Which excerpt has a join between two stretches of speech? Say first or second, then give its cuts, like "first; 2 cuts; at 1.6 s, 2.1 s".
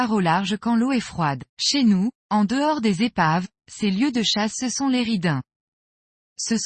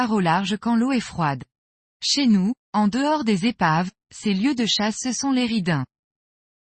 first; 1 cut; at 1.5 s